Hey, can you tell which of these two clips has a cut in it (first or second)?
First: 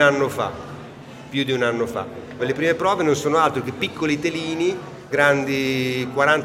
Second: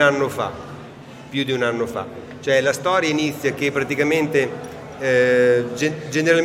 first